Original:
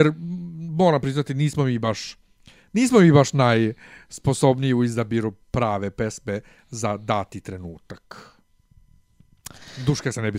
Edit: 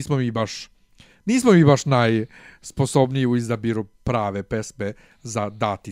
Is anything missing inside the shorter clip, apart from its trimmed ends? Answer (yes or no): no